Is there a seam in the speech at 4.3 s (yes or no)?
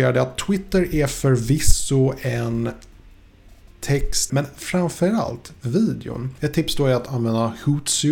yes